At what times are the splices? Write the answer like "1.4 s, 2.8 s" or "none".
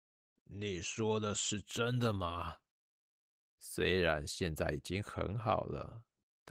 3.5 s